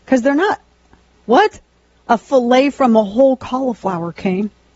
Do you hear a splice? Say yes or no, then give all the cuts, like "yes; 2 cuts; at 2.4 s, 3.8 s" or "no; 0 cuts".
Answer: no; 0 cuts